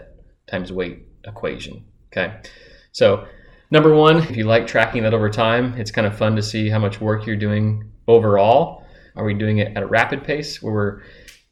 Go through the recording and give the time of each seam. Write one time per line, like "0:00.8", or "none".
0:04.3
0:09.1